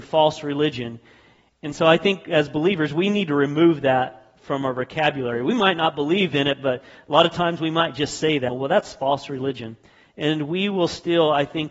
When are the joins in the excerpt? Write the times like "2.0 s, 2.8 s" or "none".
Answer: 8.5 s, 10.1 s